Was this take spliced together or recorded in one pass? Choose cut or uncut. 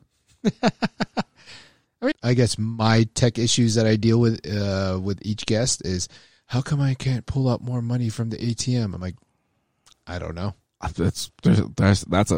cut